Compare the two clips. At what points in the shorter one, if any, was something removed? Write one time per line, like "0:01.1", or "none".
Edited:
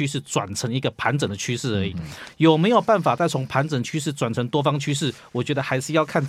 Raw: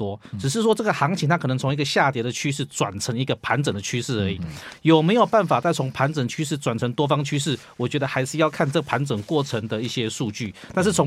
none